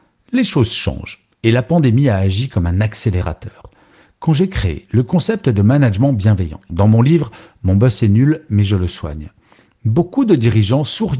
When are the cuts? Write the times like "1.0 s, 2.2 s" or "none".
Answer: 6.7 s